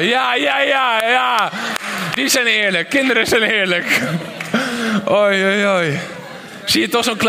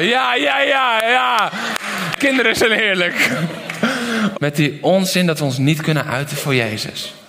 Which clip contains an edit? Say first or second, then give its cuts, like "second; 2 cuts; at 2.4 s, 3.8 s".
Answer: second; 2 cuts; at 2.1 s, 4.3 s